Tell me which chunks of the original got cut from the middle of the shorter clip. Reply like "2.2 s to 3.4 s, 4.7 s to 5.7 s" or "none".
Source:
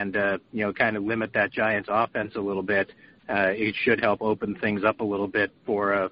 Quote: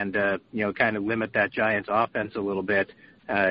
none